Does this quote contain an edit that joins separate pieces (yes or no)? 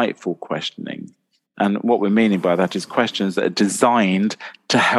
no